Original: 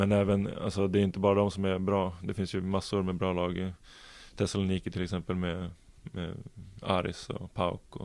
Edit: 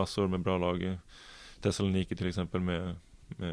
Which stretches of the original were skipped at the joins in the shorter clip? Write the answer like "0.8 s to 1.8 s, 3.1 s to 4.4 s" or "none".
none